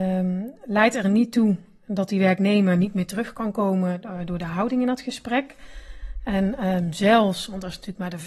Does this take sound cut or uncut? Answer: uncut